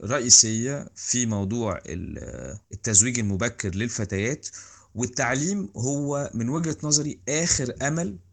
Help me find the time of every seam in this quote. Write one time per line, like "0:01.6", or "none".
0:02.6

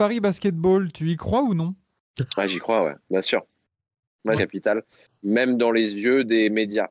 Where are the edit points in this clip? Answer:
0:04.4

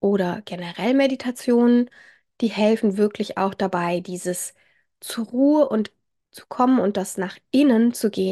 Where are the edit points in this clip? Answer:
none

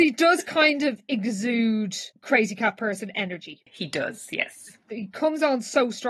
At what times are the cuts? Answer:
0:02.1
0:03.7

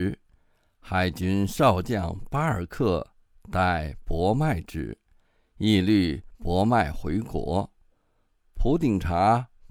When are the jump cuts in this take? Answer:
none

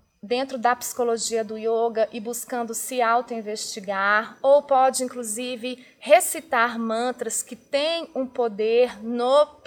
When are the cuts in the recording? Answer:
none

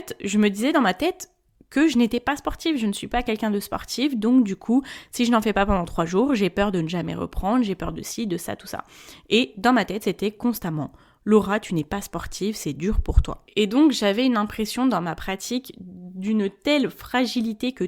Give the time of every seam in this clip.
none

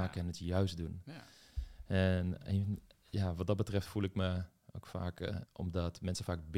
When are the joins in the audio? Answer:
0:05.4

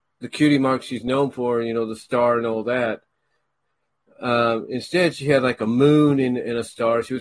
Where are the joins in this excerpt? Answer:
none

